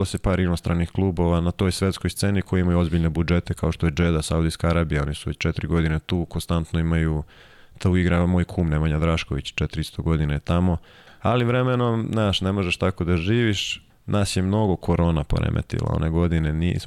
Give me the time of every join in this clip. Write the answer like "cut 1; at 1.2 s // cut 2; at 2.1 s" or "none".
cut 1; at 11.1 s // cut 2; at 13.9 s

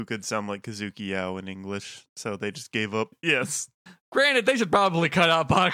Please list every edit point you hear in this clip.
cut 1; at 3.1 s

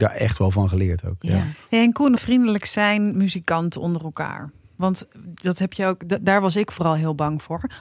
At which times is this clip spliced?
cut 1; at 2.2 s

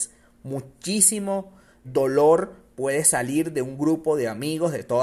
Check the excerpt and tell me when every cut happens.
cut 1; at 1.8 s

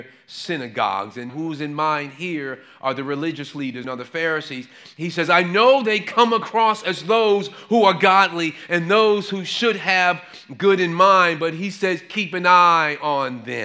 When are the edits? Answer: cut 1; at 1.3 s // cut 2; at 3.8 s

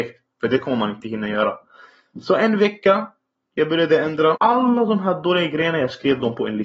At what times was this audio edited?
cut 1; at 4.4 s

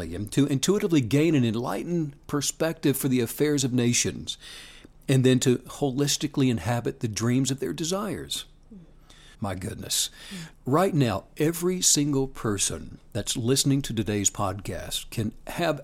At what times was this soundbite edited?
cut 1; at 9.3 s // cut 2; at 10.5 s

